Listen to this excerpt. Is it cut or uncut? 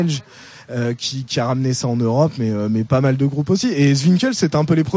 uncut